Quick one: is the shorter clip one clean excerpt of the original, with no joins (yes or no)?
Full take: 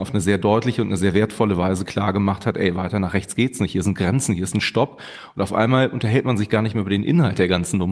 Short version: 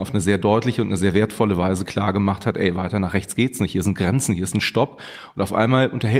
yes